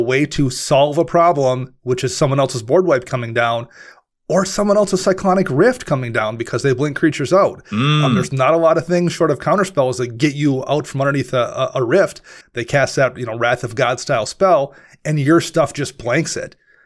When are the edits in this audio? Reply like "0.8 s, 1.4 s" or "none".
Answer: 12.4 s